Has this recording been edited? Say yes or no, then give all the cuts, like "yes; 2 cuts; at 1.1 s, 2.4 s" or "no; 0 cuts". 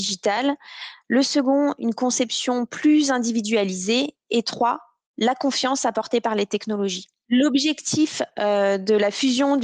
no; 0 cuts